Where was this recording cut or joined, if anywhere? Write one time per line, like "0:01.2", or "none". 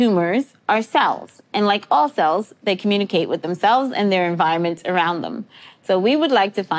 none